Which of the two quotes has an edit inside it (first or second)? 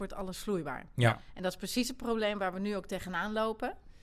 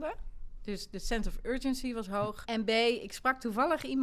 second